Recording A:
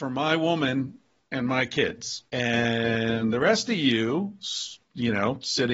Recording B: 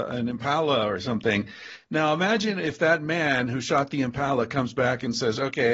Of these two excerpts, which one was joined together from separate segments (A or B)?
A